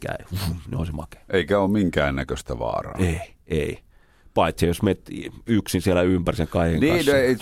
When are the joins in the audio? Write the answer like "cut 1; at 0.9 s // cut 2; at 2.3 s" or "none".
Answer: none

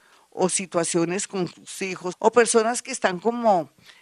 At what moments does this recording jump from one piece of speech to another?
cut 1; at 2.1 s

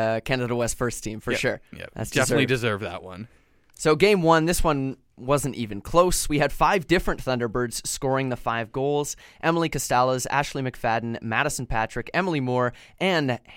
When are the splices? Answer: none

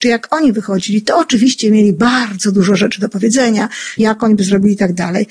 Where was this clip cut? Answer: cut 1; at 4.0 s

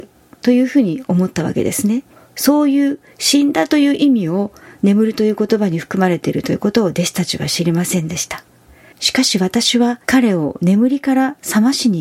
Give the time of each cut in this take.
cut 1; at 2.1 s // cut 2; at 8.9 s // cut 3; at 10.0 s

